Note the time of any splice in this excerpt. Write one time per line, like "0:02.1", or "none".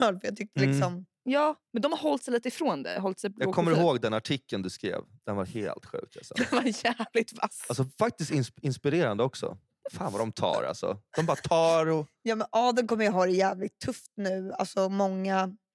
none

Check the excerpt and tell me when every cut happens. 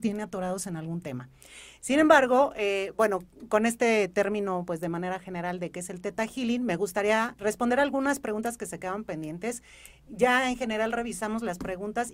0:07.4

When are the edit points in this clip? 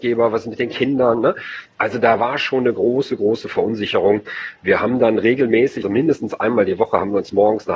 0:05.8

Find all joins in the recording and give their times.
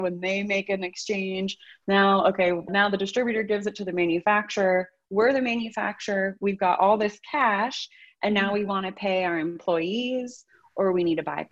0:02.7

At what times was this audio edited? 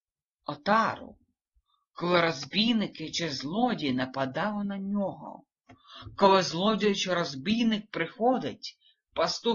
none

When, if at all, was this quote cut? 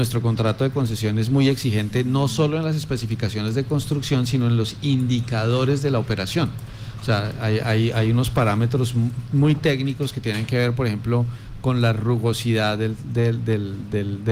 none

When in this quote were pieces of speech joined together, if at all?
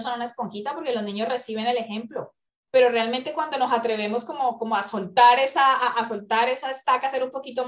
0:02.7

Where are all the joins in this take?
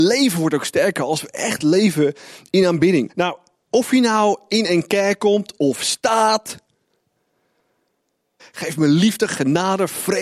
0:03.1
0:05.6
0:08.4

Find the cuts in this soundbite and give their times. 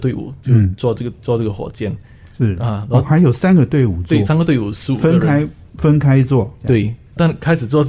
0:04.2
0:06.6

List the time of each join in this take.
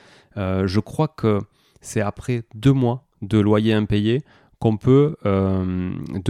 none

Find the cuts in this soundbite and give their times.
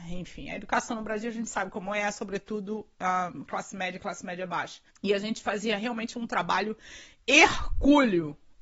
0:04.9

